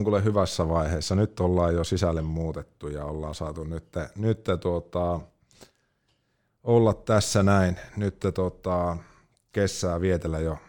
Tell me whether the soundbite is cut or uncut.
uncut